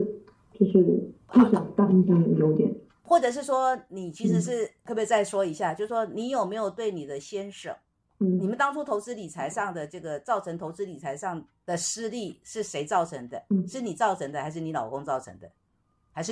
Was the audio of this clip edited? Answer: no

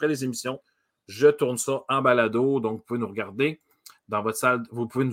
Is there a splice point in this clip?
no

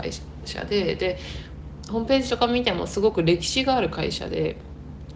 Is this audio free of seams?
yes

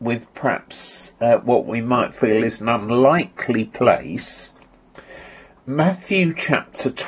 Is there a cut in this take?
no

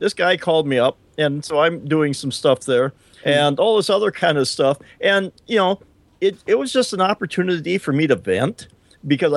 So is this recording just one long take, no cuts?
no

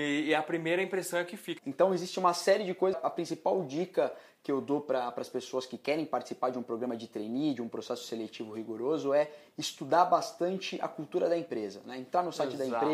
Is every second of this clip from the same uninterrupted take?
no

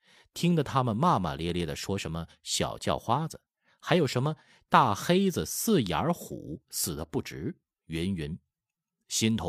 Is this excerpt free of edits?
yes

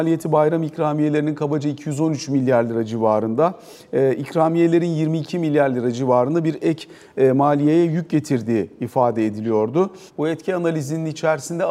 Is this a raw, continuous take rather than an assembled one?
no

